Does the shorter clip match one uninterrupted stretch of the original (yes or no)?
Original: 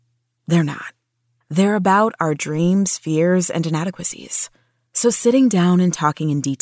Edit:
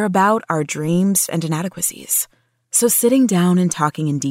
no